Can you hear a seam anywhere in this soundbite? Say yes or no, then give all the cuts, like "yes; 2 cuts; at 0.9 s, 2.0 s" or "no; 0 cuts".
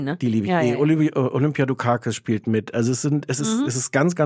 no; 0 cuts